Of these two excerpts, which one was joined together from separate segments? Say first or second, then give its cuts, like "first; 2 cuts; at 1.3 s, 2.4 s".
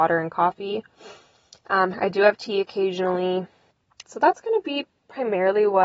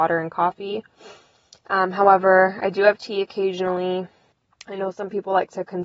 first; 2 cuts; at 1.9 s, 4.0 s